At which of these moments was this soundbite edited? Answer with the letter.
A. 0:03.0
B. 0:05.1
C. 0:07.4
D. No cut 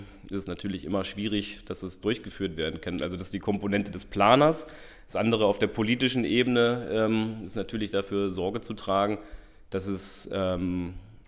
D